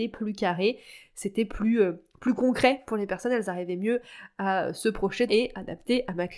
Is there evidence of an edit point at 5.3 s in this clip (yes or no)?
yes